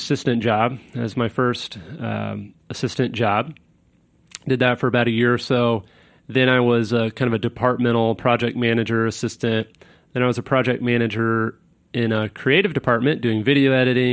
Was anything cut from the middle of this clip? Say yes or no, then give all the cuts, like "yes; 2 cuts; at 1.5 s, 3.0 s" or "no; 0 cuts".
no; 0 cuts